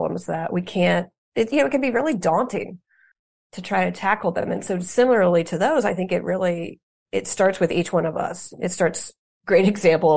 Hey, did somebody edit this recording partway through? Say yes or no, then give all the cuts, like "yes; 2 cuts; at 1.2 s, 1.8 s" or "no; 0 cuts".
no; 0 cuts